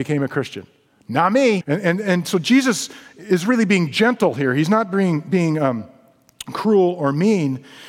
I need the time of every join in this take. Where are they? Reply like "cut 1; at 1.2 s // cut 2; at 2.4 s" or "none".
cut 1; at 1.6 s